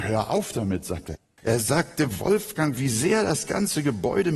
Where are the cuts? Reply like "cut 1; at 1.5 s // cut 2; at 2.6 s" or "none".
cut 1; at 1.4 s // cut 2; at 2.8 s